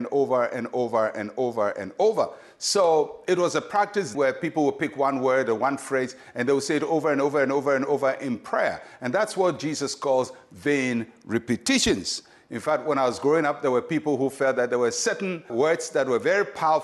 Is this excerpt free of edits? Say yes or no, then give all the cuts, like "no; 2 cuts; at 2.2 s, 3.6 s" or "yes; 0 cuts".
no; 2 cuts; at 4.1 s, 15.5 s